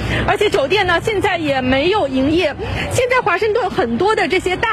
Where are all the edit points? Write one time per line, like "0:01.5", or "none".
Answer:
none